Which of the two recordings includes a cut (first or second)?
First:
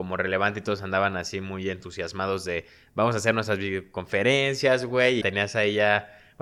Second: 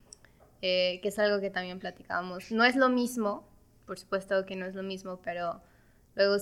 first